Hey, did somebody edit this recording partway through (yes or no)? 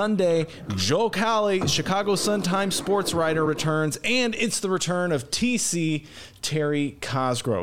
no